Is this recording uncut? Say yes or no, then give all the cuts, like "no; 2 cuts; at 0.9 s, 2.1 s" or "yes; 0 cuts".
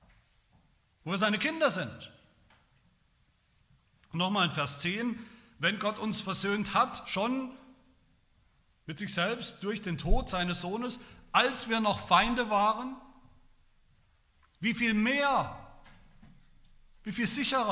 yes; 0 cuts